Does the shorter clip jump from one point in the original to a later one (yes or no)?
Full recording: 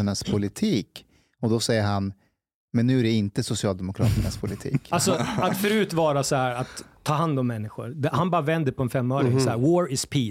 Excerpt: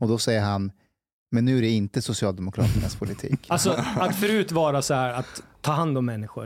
no